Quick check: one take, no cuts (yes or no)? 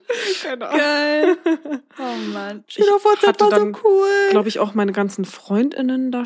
no